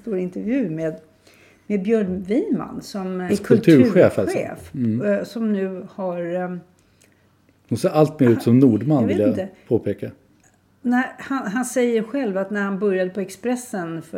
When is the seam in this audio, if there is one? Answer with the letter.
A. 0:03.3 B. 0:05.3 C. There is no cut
A